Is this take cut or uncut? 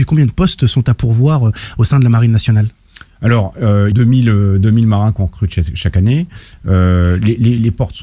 cut